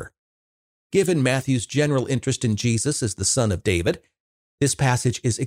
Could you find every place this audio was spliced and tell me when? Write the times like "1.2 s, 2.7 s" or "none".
none